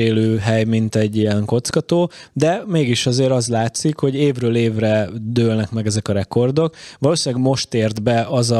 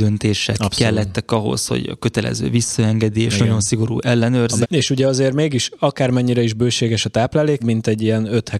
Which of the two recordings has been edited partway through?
second; 2 cuts; at 4.6 s, 7.6 s

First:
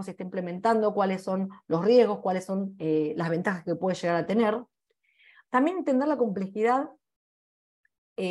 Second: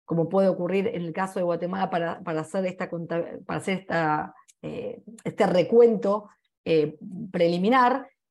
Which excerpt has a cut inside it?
first; 1 cut; at 5.4 s

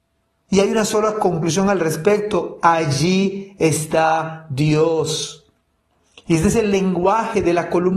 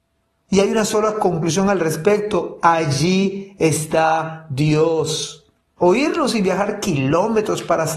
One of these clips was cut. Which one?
second; 1 cut; at 5.8 s

